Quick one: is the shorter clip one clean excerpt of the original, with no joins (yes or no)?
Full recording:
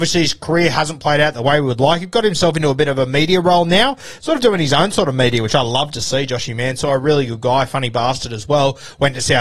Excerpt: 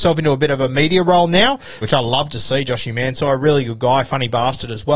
no